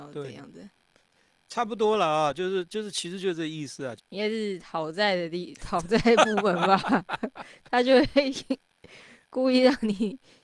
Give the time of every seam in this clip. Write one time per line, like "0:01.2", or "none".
0:04.0